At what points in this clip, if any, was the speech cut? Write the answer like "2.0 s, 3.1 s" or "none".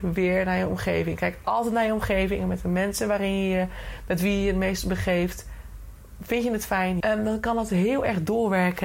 7.0 s